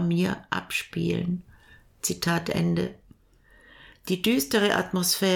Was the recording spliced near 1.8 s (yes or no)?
no